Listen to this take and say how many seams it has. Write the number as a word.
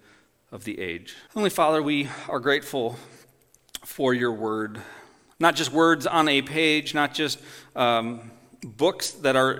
one